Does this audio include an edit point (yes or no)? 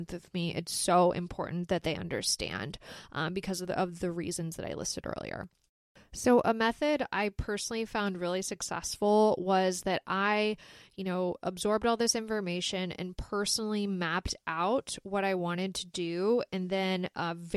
no